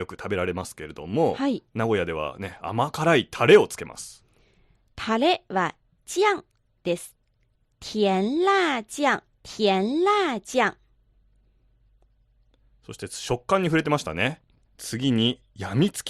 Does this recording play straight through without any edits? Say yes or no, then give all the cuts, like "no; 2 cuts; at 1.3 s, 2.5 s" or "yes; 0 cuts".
no; 3 cuts; at 7.7 s, 9.3 s, 14.6 s